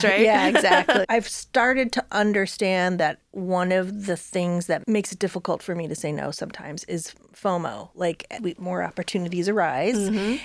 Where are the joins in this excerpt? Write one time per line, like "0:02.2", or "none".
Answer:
0:01.0
0:08.4